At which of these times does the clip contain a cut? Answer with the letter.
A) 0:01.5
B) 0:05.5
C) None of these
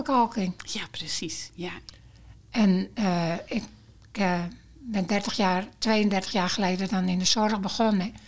C